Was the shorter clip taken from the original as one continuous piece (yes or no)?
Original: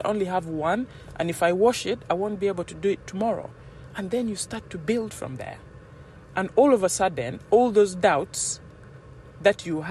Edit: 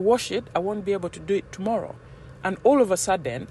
no